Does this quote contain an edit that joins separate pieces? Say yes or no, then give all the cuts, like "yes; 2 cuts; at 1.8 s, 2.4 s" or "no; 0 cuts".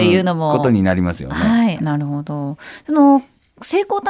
yes; 1 cut; at 1.8 s